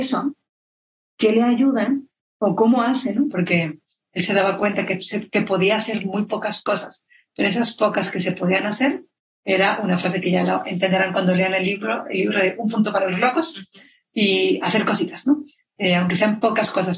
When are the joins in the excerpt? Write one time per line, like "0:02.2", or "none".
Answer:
0:03.3